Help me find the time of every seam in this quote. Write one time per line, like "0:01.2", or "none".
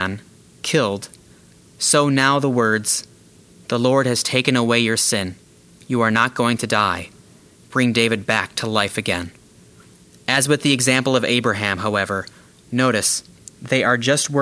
none